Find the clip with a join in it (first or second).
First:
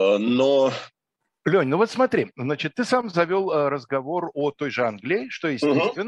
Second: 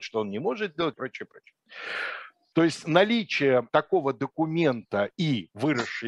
second